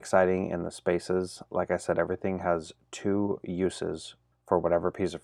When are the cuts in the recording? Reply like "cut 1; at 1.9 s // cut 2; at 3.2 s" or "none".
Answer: cut 1; at 4.3 s